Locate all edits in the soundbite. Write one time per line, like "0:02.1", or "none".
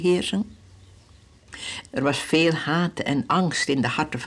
0:01.9